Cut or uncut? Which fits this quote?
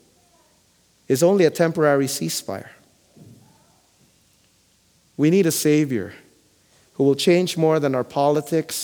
uncut